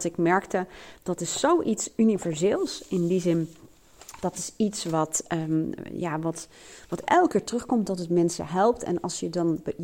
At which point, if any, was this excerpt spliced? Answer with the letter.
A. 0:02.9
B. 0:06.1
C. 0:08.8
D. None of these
D